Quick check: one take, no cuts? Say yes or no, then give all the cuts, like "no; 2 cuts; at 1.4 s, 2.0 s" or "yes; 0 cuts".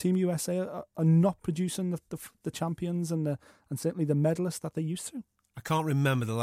yes; 0 cuts